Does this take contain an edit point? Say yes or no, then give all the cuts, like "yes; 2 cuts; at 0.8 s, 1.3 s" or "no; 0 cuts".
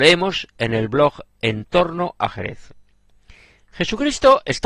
no; 0 cuts